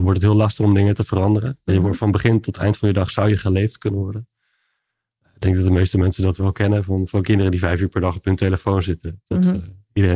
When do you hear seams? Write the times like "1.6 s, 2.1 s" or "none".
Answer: 6.4 s

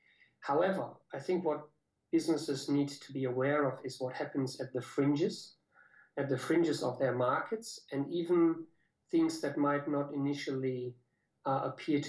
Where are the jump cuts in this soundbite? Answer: none

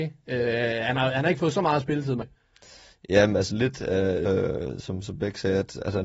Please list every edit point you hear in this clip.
2.2 s, 4.3 s

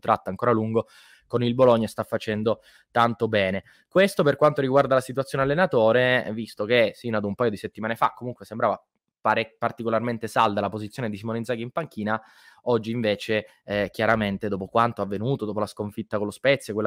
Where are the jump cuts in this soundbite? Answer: none

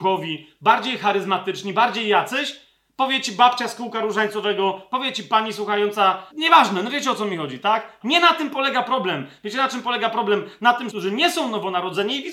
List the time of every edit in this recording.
6.3 s, 8.0 s, 10.9 s

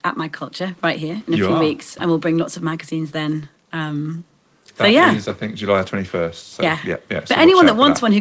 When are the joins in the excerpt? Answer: 2.0 s

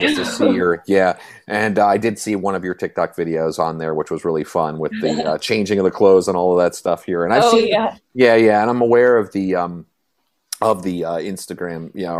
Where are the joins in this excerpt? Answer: none

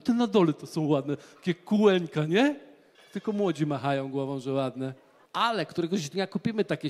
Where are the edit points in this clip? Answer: 2.9 s, 5.3 s

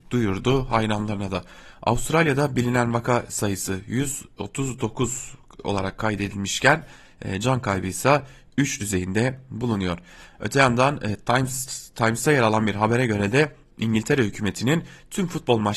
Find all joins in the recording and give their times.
none

